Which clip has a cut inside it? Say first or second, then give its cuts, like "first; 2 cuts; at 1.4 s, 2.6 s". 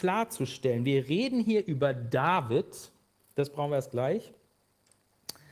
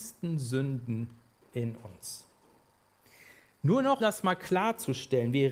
second; 1 cut; at 4.0 s